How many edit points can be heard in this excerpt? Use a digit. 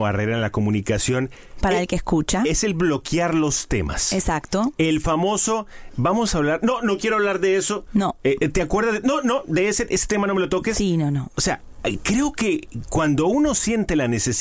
0